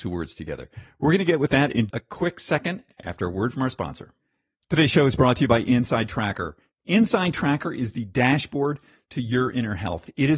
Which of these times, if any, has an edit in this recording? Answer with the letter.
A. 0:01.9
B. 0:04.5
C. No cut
A